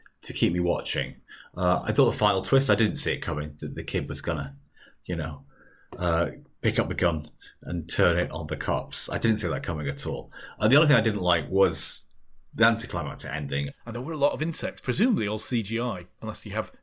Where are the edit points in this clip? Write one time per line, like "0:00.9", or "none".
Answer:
0:13.7